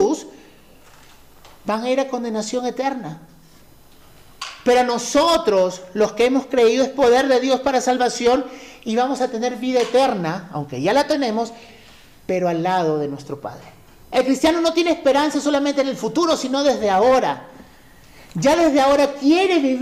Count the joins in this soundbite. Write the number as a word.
one